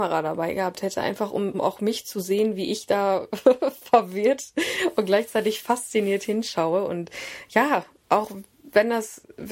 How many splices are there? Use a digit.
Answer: 1